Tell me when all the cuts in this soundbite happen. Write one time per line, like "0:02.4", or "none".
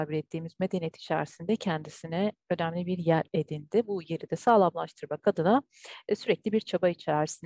none